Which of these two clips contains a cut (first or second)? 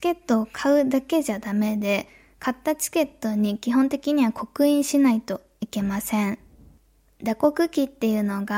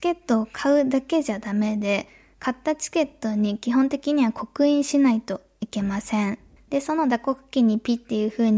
second